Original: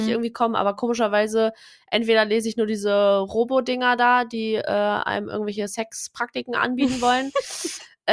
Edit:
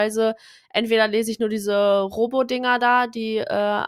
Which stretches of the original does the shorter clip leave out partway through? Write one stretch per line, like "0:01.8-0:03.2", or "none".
none